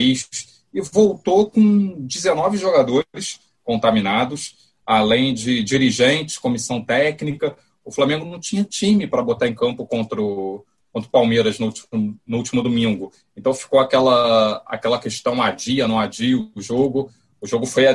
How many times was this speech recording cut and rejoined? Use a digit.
0